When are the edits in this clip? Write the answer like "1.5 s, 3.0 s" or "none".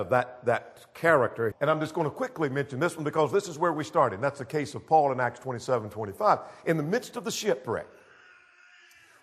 1.5 s

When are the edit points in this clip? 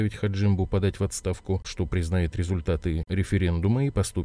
1.6 s

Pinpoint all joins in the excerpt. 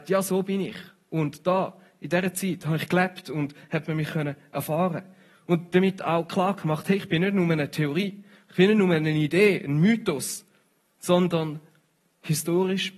none

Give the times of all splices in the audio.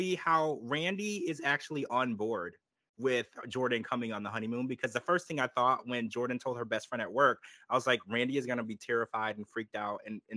none

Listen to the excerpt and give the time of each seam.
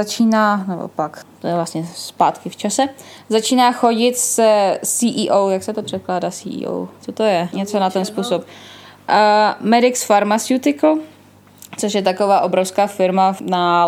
7.5 s

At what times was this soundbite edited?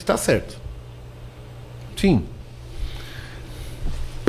1.9 s

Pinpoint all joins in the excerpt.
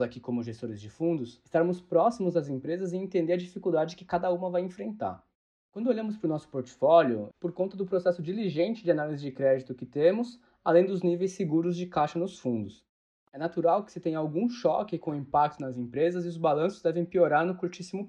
7.3 s, 13.2 s

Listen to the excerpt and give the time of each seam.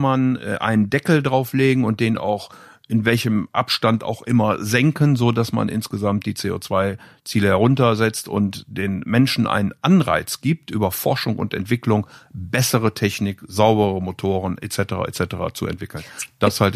none

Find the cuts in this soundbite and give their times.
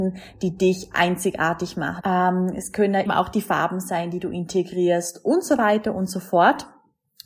2.0 s, 3.0 s

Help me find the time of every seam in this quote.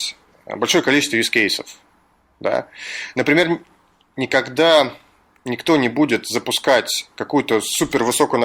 none

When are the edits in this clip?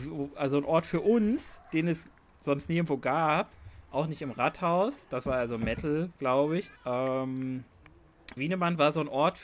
6.8 s, 8.4 s

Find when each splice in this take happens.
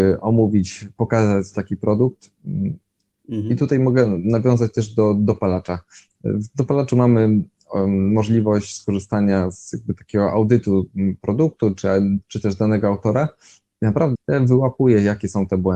14.2 s

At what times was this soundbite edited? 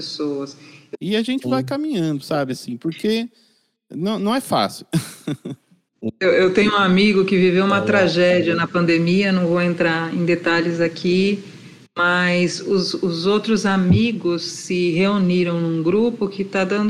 1.0 s

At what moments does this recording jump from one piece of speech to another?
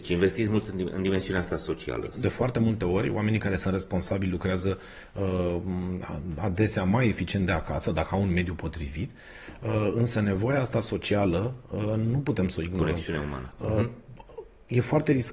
2.2 s

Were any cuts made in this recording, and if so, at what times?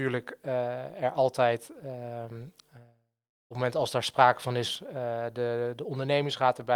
none

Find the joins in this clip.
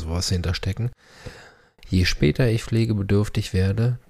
none

